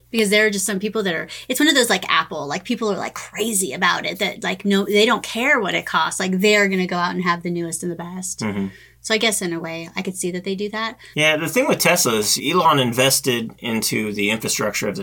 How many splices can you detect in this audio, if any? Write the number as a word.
two